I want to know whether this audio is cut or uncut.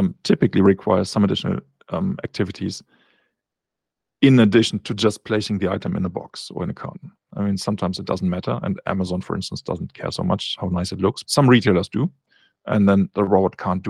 cut